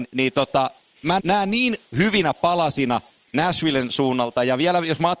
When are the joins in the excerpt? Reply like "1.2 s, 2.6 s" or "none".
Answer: 1.2 s